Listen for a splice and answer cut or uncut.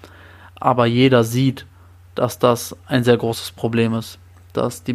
uncut